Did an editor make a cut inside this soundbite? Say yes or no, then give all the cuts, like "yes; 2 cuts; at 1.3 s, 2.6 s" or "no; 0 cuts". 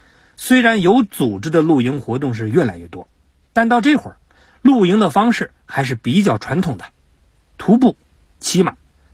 no; 0 cuts